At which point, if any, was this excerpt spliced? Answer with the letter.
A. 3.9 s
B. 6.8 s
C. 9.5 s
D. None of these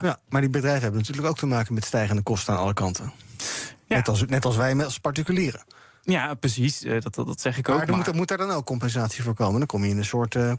D